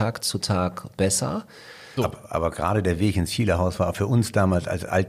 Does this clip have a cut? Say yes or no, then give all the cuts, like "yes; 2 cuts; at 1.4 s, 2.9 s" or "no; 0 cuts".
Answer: yes; 1 cut; at 2.0 s